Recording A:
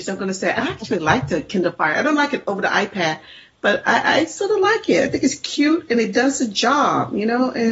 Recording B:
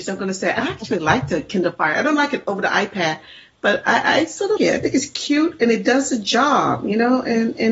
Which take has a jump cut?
B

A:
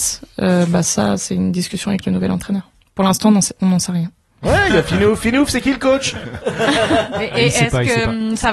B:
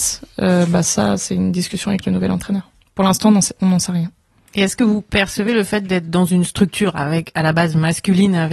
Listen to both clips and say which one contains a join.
A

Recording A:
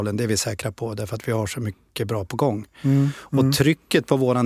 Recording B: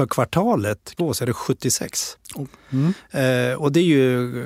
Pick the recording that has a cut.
B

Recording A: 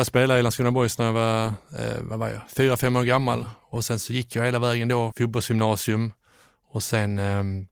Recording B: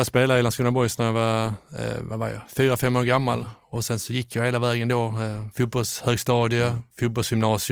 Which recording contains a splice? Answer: A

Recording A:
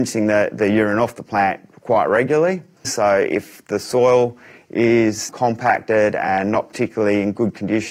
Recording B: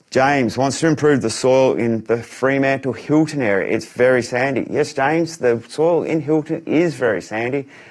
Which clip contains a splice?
A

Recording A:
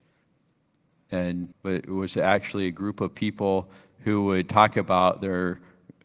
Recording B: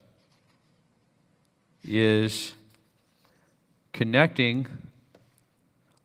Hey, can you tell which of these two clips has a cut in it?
A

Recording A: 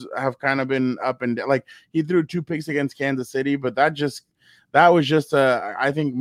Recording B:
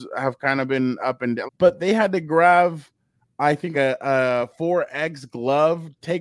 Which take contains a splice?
B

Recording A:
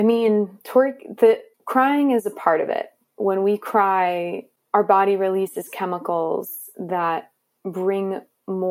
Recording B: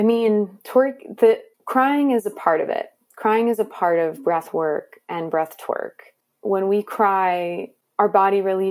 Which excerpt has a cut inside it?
A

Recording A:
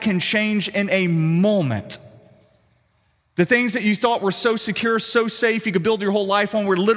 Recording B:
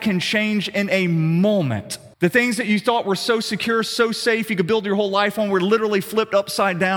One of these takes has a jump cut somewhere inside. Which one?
B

